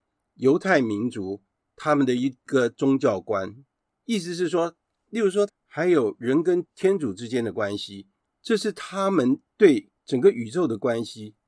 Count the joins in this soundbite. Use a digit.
2